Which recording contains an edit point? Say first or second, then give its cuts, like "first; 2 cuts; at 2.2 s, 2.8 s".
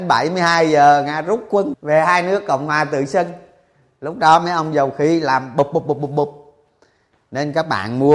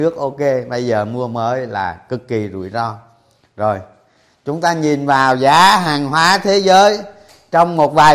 first; 1 cut; at 1.7 s